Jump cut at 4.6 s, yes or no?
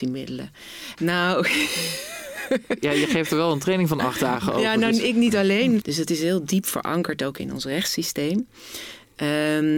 no